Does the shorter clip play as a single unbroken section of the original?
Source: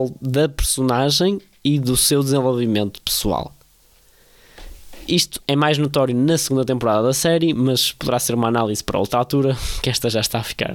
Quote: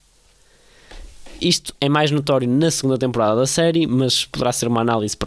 yes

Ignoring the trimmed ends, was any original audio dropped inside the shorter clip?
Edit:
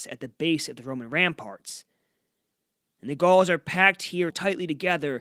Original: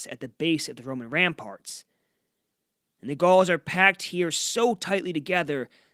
yes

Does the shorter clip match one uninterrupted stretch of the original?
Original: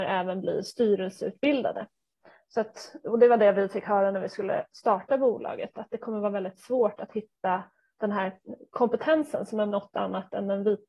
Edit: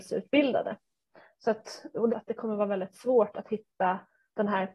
no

